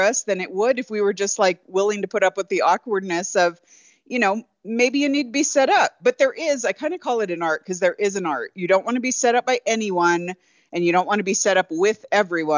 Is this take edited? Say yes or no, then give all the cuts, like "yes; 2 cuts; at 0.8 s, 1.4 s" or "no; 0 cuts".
no; 0 cuts